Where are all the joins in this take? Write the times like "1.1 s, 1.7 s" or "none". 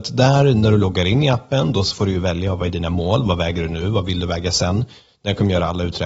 none